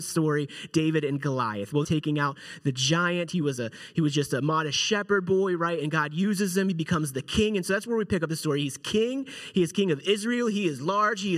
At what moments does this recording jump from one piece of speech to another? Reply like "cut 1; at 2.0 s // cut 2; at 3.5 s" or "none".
cut 1; at 1.8 s